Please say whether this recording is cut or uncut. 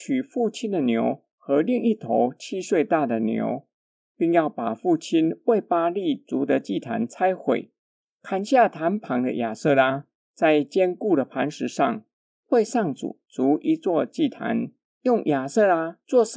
cut